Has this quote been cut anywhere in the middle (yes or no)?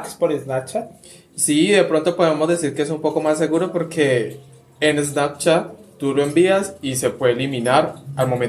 no